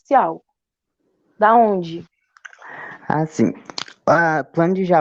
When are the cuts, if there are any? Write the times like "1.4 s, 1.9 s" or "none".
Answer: none

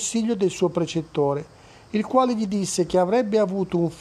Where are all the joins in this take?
none

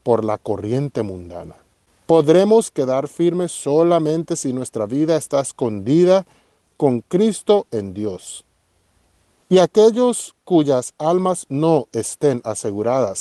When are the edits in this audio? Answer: 9.4 s

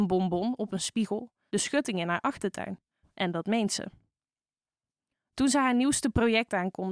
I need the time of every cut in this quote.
1.5 s, 3.0 s

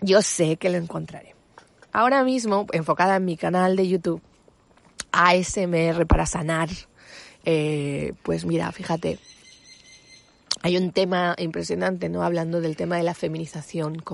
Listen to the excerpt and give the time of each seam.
none

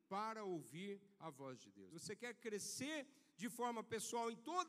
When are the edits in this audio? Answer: 1.9 s

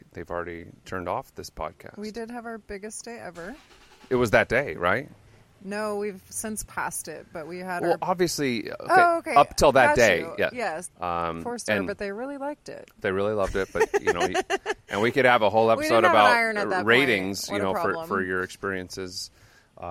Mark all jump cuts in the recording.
10.8 s

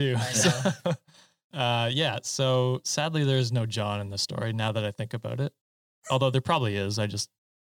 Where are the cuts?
none

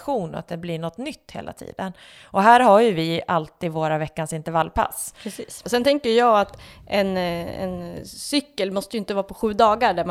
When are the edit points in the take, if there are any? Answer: 5.6 s

